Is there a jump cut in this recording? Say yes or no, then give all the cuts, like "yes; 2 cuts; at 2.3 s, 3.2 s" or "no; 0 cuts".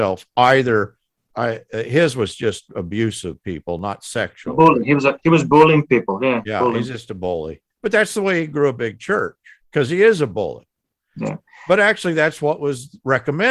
no; 0 cuts